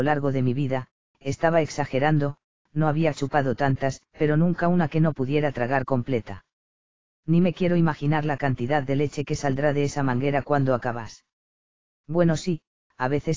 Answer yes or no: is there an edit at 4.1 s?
yes